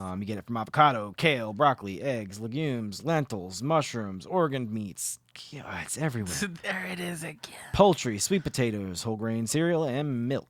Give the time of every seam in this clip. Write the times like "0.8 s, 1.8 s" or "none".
none